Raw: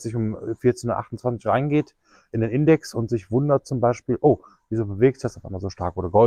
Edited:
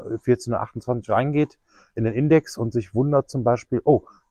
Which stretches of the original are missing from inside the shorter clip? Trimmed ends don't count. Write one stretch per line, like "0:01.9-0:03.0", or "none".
none

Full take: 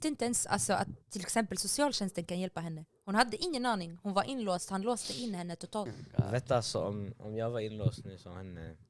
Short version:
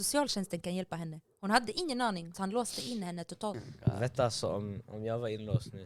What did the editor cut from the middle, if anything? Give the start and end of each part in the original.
0:04.0-0:04.7

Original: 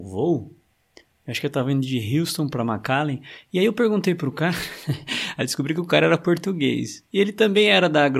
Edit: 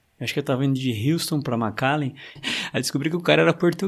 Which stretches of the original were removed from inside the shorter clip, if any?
0:03.4-0:05.0

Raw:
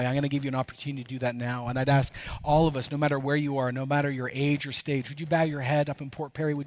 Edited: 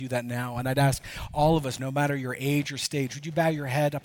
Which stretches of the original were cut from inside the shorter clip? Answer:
0:02.9-0:03.7

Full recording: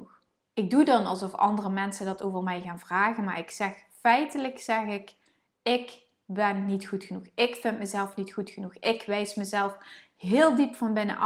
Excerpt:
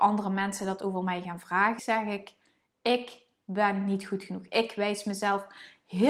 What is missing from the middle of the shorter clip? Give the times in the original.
0:03.2-0:04.6
0:07.3-0:08.8

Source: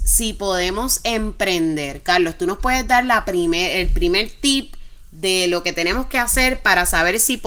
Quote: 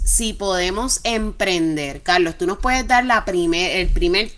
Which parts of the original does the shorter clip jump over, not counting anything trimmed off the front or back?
none

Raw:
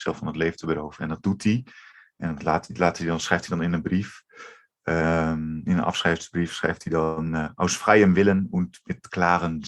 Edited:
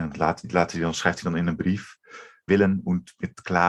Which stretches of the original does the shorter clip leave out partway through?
0:04.7-0:08.1

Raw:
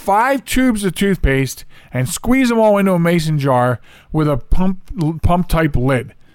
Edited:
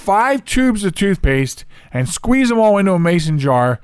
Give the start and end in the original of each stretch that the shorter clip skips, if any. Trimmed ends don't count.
none

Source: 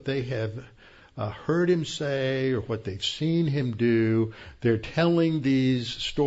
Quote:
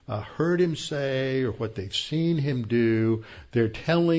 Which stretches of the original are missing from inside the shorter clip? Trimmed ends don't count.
none

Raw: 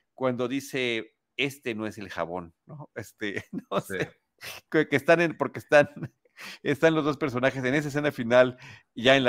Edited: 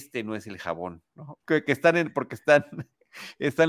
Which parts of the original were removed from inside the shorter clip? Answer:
0:02.9-0:04.6

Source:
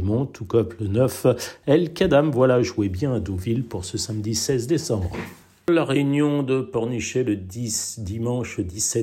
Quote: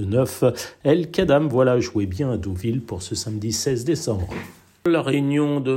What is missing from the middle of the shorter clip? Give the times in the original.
none

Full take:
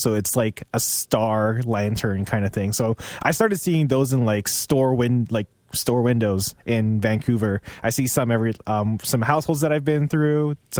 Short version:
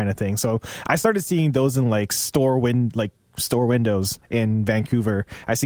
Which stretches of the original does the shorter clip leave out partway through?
none

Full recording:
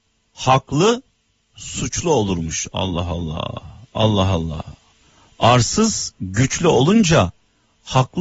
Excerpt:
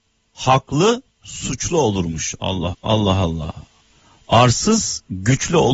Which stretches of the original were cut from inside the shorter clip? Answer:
0:01.1-0:01.4
0:03.1-0:03.8

